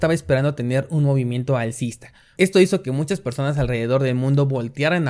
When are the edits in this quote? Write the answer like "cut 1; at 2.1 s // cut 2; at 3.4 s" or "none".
cut 1; at 2.4 s